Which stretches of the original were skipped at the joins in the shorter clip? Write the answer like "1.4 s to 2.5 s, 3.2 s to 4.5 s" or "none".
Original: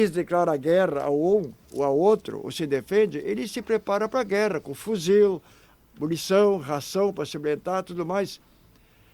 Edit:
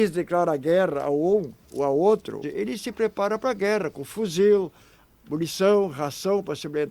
2.4 s to 3.1 s